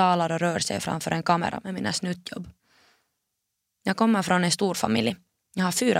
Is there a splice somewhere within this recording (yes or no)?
no